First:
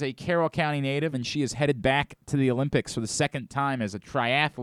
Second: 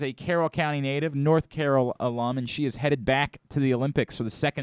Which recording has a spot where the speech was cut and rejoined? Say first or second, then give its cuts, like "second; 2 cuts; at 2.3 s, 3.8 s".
first; 1 cut; at 1.1 s